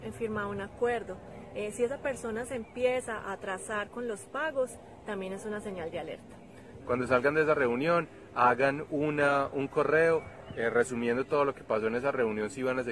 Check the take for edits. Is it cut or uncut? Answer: cut